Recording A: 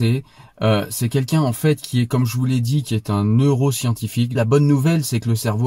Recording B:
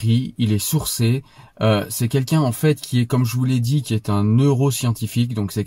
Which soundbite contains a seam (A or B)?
A